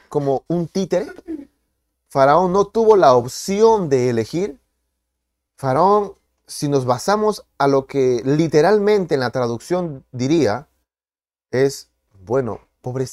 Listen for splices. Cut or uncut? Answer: uncut